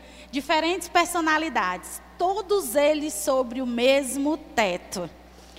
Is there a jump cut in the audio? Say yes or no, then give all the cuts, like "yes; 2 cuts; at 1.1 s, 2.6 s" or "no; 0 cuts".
no; 0 cuts